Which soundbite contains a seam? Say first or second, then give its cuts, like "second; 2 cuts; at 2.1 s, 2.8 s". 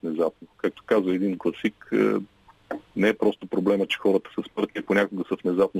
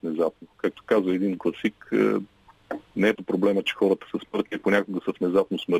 second; 1 cut; at 3.2 s